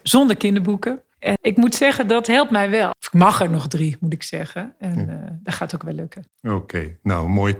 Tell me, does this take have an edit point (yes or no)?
yes